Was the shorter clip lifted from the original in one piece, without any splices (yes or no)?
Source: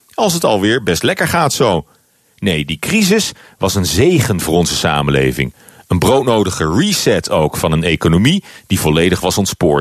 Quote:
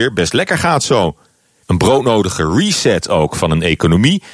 no